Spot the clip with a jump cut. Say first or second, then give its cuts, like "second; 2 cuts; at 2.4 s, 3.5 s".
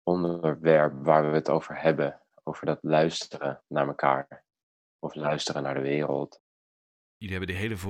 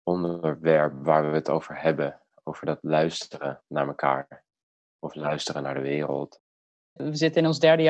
second; 1 cut; at 7.0 s